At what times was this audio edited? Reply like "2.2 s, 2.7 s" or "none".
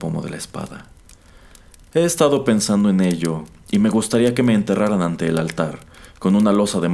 none